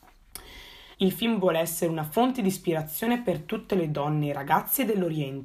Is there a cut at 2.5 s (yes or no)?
no